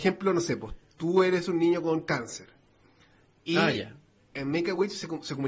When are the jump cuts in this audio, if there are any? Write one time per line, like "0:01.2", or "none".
none